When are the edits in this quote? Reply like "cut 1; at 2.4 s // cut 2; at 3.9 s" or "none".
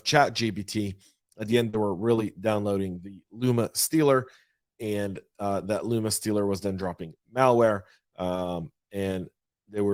none